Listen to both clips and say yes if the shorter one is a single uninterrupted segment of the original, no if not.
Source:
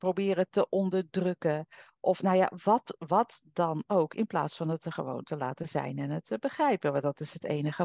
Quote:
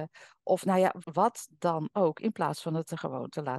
no